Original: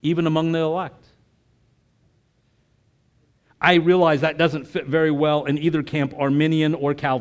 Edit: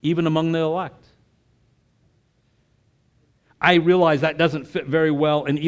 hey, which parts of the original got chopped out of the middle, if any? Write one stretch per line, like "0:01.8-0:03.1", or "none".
none